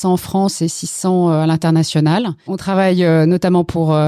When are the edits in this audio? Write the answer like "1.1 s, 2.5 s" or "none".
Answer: 2.5 s